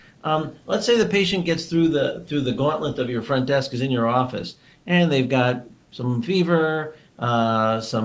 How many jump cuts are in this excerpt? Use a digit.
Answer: 0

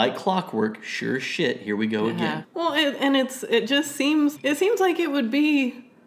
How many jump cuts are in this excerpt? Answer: 2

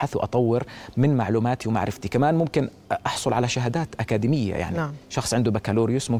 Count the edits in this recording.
0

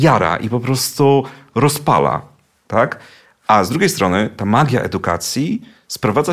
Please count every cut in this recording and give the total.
0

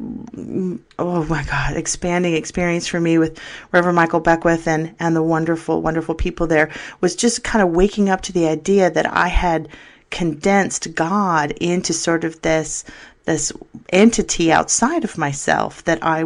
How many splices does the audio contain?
0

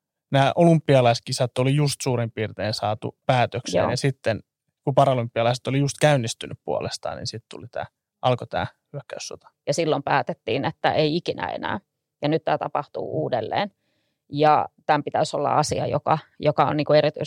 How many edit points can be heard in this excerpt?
1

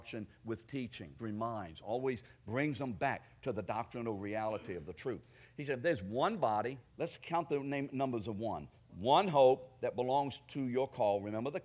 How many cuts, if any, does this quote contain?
3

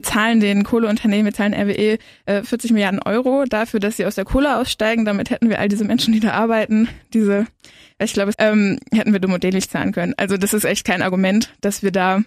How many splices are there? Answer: 1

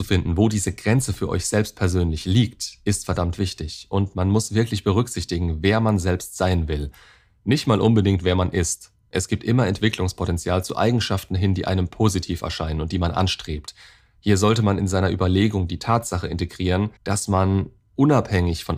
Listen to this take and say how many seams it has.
1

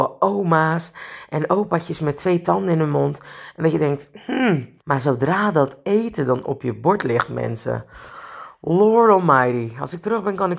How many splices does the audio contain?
1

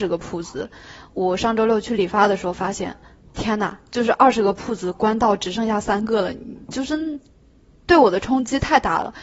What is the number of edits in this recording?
0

